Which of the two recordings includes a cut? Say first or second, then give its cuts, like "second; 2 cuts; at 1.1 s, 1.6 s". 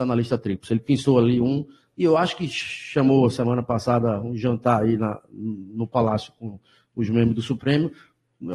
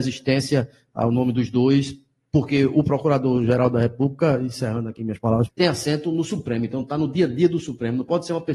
second; 1 cut; at 5.5 s